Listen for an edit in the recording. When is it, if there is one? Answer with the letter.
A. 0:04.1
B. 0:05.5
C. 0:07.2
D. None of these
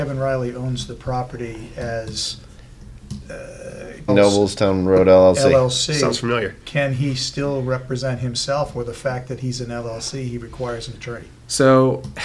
A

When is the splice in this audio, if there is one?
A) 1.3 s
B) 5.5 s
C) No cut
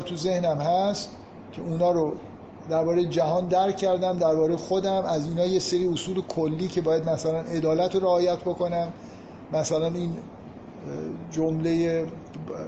C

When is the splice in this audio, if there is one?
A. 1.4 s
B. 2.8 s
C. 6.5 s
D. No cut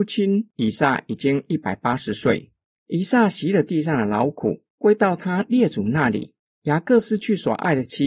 C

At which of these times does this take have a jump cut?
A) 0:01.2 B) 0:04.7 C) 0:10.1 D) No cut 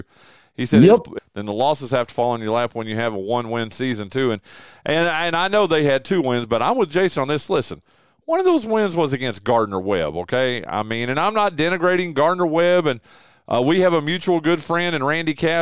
A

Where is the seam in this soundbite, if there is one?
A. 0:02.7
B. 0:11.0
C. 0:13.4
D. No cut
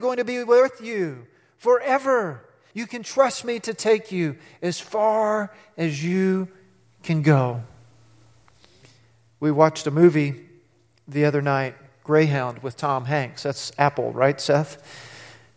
A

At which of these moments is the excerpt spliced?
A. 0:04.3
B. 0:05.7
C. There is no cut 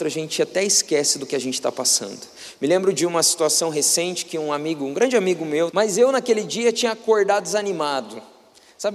B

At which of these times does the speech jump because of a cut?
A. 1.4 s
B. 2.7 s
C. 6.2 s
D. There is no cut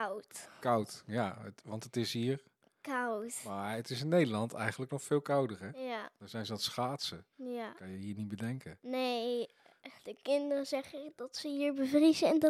D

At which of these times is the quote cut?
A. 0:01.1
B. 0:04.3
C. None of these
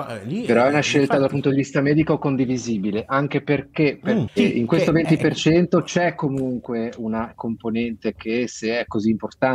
B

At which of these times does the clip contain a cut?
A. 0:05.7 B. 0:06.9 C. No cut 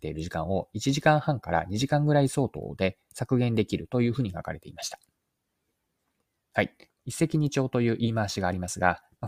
B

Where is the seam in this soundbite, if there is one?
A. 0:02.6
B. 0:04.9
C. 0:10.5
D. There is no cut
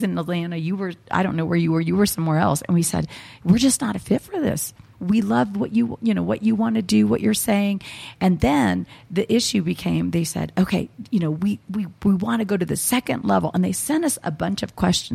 B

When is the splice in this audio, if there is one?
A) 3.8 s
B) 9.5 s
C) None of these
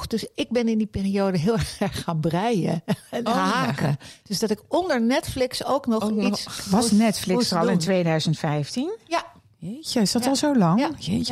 C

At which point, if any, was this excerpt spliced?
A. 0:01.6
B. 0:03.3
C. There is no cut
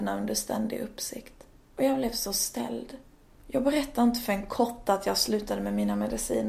B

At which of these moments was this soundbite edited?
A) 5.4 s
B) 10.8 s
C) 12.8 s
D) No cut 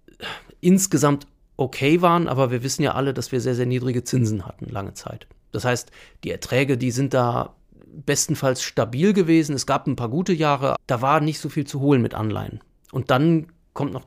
B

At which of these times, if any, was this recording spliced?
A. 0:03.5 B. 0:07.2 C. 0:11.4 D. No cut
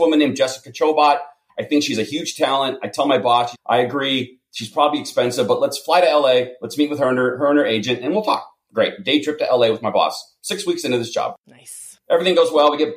A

